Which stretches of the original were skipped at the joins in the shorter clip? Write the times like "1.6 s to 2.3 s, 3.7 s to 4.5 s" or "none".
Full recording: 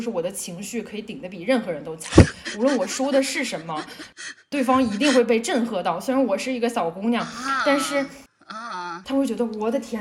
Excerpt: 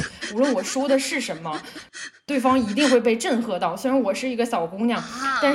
none